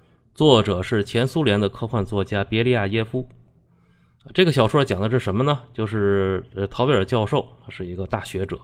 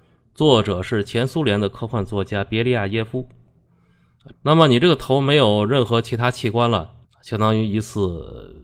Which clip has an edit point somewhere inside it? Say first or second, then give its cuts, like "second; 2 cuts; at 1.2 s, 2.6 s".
second; 2 cuts; at 4.3 s, 7.0 s